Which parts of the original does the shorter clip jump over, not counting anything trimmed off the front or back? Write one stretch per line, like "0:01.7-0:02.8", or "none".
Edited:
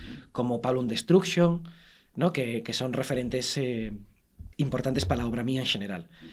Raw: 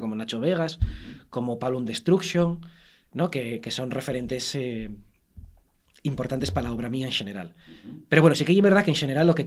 0:05.5-0:06.0